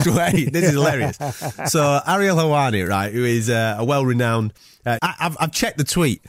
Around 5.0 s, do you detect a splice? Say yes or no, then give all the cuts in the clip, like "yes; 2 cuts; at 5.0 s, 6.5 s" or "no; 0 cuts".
yes; 1 cut; at 5.0 s